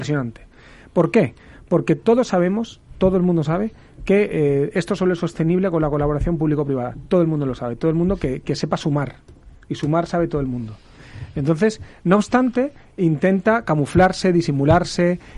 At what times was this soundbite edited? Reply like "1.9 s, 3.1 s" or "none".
none